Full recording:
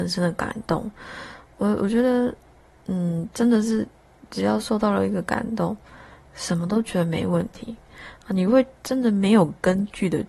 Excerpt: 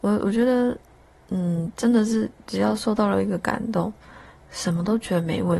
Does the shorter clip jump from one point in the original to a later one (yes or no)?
yes